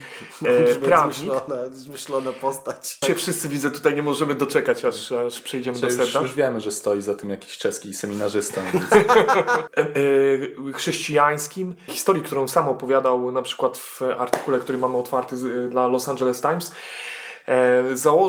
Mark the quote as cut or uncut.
cut